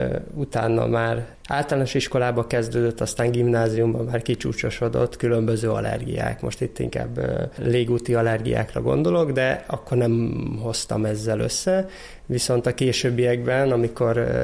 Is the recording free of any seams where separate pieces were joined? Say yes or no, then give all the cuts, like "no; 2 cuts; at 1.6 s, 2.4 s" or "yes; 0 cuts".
yes; 0 cuts